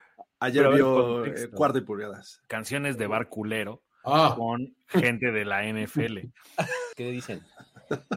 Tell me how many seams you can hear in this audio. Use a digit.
2